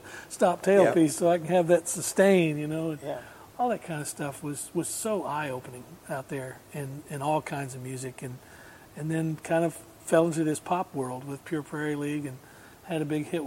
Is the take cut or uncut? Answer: uncut